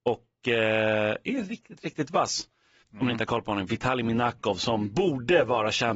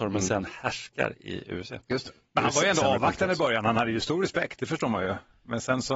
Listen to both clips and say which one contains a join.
first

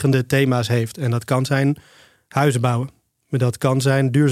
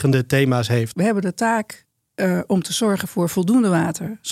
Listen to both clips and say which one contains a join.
second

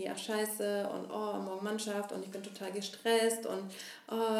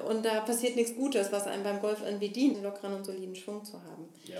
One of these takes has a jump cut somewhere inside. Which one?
second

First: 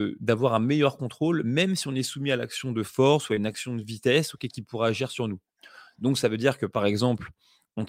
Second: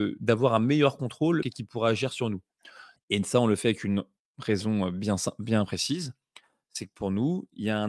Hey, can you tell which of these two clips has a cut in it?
second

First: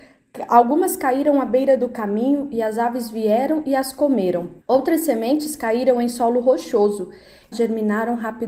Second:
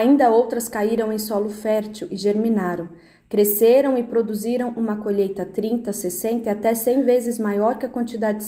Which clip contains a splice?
first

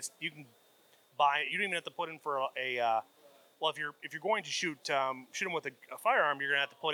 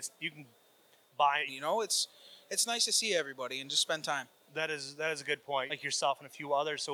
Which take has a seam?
second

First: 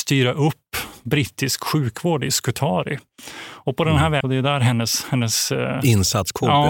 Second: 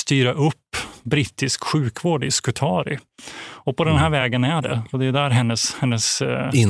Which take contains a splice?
first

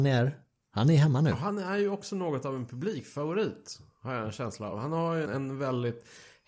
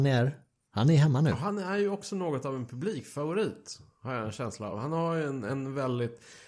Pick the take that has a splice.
first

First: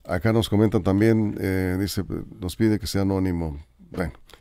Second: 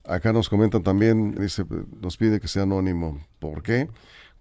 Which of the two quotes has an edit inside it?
second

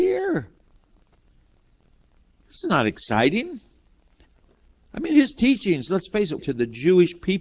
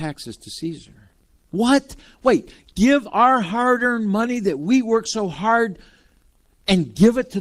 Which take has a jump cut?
first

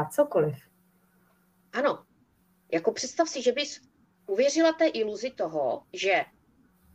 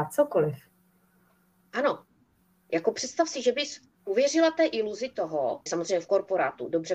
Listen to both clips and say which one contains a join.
second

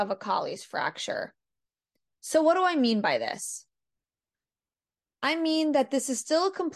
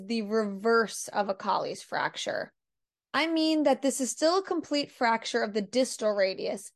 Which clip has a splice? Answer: second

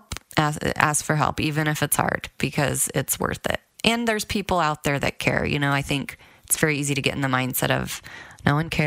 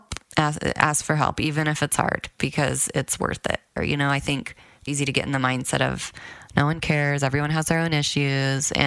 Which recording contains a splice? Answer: second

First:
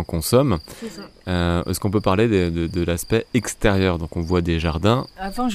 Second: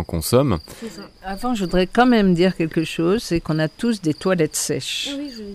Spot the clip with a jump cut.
second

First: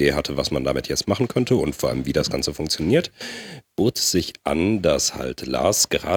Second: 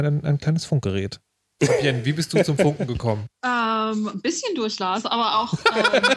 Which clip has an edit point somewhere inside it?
second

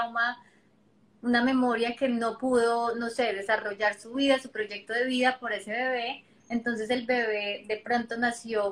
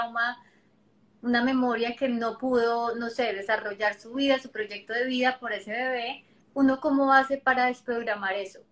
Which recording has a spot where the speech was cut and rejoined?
second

